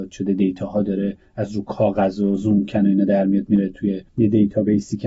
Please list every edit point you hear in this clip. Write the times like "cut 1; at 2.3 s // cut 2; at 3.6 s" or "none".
cut 1; at 4.1 s